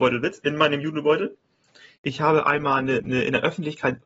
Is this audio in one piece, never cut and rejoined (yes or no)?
no